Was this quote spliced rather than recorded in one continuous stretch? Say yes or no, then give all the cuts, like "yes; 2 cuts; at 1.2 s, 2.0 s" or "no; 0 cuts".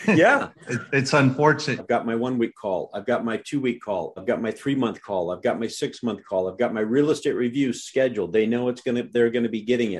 yes; 2 cuts; at 1.8 s, 4.2 s